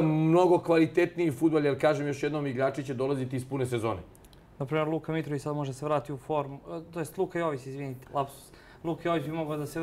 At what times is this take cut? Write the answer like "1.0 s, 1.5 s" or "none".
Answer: 8.0 s